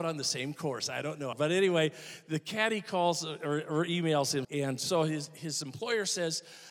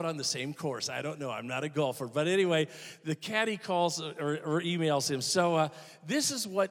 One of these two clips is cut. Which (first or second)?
first